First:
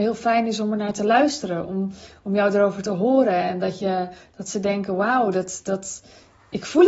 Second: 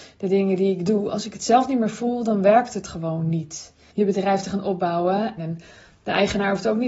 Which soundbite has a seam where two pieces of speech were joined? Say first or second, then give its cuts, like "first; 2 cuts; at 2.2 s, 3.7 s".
second; 2 cuts; at 3.9 s, 5.4 s